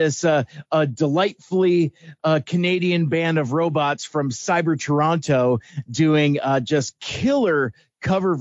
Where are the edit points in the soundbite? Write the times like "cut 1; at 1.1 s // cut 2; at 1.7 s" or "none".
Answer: none